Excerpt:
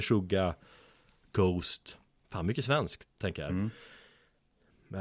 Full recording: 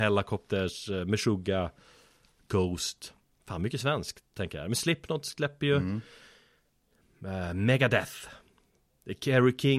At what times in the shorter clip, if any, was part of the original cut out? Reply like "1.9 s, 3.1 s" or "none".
3.5 s